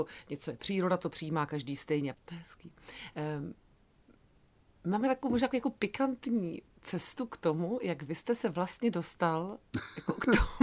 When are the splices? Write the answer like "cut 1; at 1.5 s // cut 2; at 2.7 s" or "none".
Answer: cut 1; at 2.1 s